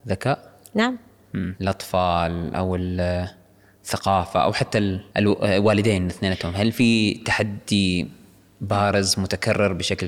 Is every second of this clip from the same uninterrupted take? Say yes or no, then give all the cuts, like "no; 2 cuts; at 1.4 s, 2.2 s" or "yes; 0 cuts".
no; 2 cuts; at 1.6 s, 5.1 s